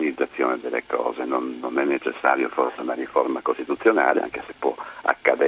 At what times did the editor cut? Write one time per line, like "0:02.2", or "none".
none